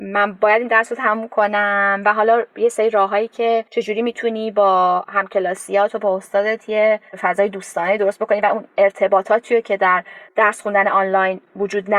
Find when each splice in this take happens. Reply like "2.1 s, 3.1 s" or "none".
3.7 s, 7.1 s, 10.3 s